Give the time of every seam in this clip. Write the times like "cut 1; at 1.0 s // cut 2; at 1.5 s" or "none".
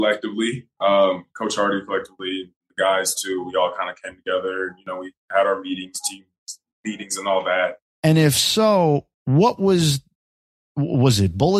cut 1; at 7.8 s // cut 2; at 9.2 s